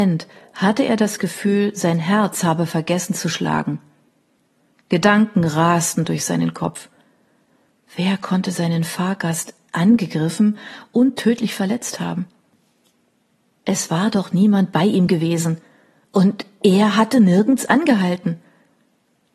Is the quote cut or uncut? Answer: uncut